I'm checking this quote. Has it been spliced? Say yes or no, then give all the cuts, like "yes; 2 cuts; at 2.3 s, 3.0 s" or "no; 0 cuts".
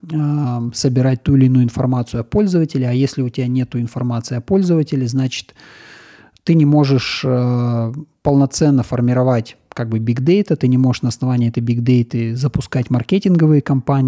no; 0 cuts